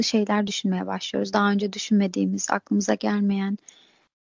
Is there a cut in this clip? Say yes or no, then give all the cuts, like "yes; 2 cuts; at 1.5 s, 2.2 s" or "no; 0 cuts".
no; 0 cuts